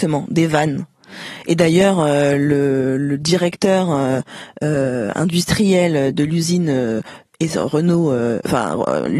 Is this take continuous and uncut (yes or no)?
yes